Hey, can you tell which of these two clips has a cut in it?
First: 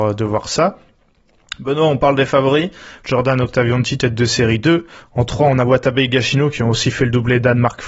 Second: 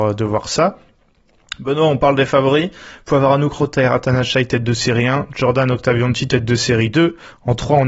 first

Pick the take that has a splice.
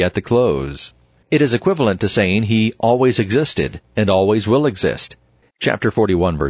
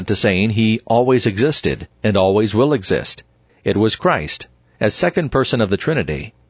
first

